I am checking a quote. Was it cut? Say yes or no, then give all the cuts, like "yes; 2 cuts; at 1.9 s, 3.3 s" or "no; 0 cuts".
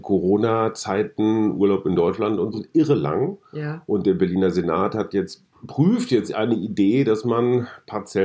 yes; 1 cut; at 2.5 s